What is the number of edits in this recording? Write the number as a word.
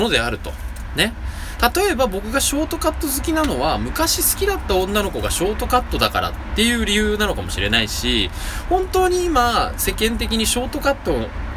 zero